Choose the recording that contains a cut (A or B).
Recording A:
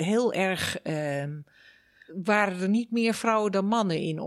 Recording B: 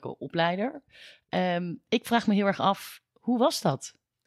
A